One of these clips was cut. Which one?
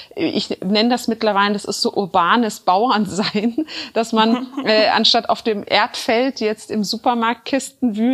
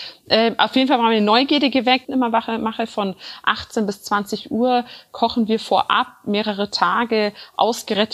second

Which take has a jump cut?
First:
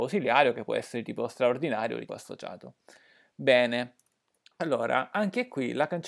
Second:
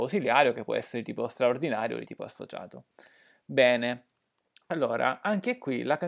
first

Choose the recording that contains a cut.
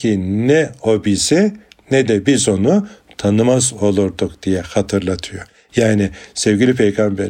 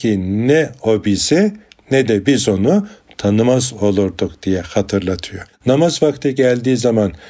second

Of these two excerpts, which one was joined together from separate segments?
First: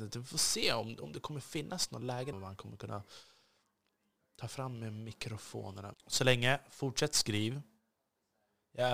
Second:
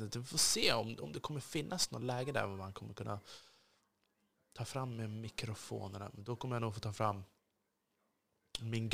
first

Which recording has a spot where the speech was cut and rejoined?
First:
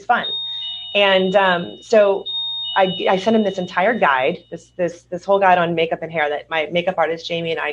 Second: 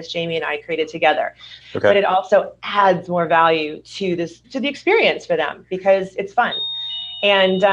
second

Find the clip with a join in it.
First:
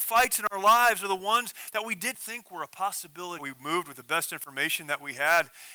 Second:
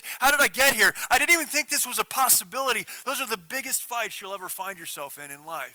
first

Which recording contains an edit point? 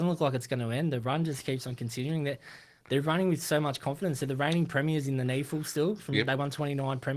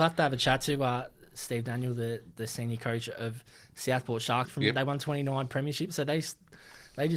second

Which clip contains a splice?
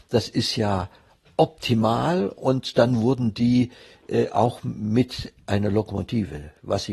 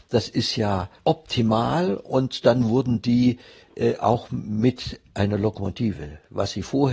second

